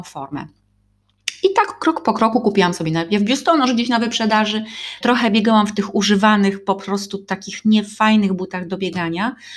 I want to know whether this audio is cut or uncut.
cut